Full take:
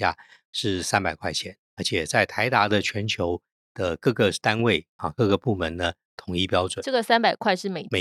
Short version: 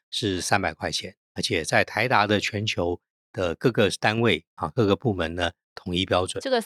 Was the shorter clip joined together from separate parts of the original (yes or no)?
no